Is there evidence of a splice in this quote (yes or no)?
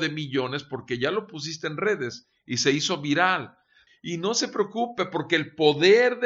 yes